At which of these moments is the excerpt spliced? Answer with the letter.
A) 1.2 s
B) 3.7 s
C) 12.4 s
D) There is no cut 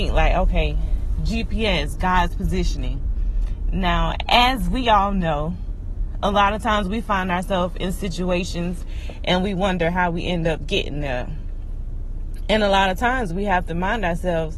D